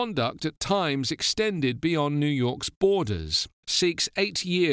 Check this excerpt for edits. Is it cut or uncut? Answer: cut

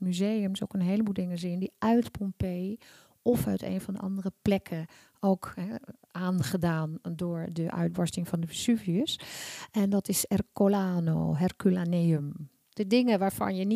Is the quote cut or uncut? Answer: cut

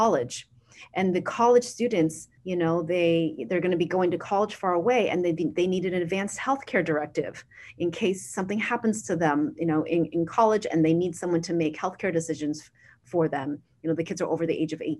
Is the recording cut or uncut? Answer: cut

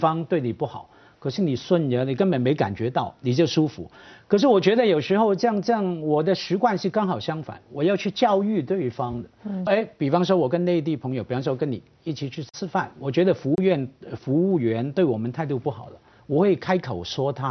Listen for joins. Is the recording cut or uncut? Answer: cut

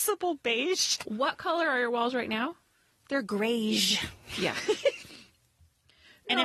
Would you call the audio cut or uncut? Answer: cut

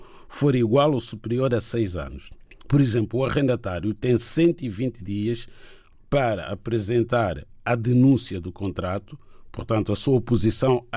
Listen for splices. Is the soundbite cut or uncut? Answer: cut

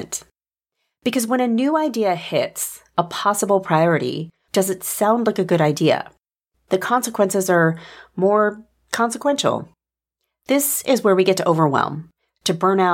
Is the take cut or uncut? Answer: cut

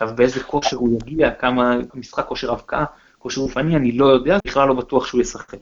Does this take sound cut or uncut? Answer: cut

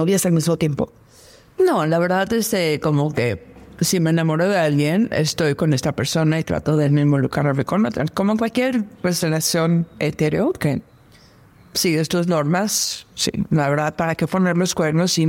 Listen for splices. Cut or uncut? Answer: uncut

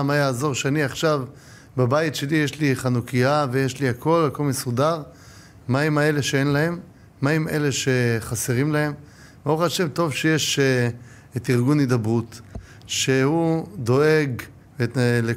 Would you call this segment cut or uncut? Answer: uncut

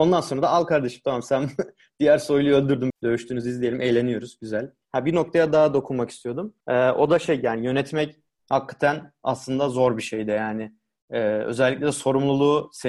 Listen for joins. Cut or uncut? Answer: cut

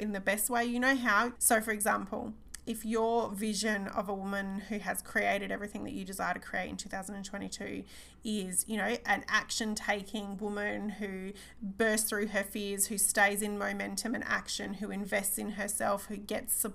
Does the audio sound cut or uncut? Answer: cut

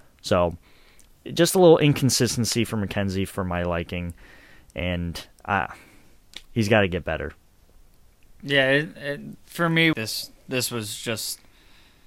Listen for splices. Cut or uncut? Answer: cut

